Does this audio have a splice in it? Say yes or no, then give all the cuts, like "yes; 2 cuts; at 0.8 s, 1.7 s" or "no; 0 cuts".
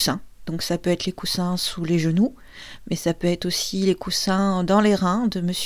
no; 0 cuts